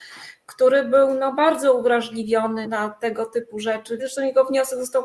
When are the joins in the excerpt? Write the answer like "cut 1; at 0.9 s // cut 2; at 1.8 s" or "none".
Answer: cut 1; at 2.6 s // cut 2; at 4.0 s